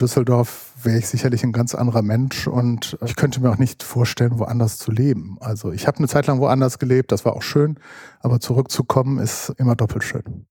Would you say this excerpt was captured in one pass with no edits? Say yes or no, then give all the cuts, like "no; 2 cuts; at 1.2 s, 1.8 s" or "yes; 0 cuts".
yes; 0 cuts